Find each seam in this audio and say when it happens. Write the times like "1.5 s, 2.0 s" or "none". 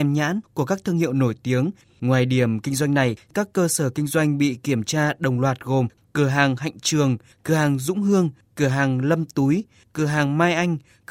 1.8 s